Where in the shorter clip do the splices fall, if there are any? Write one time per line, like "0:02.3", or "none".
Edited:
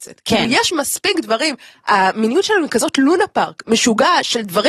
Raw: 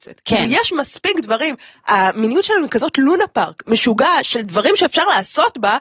none